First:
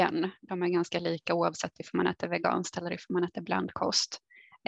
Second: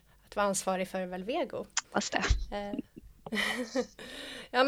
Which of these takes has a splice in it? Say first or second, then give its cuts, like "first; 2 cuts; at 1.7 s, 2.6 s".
second; 1 cut; at 1.8 s